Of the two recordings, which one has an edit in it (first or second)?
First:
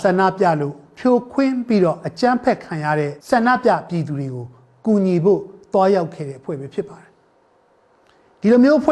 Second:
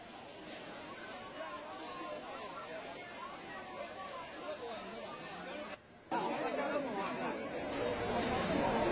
first